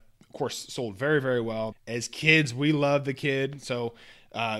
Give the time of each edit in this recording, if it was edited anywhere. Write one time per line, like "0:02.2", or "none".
0:01.7